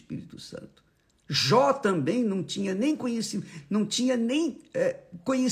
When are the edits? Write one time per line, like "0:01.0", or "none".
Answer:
0:01.1